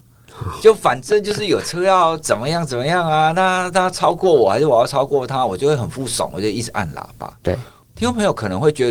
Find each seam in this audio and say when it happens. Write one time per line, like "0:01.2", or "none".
0:07.4